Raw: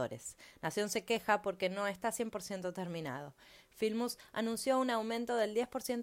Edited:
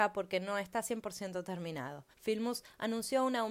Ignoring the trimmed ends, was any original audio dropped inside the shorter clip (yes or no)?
yes